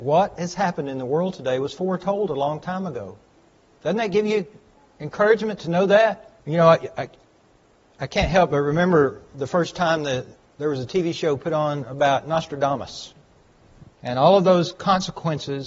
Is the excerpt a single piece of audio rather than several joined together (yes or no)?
no